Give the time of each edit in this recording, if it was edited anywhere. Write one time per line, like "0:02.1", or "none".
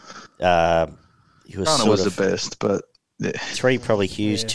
0:03.5